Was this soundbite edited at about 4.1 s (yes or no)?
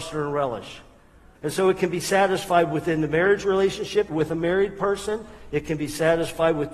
yes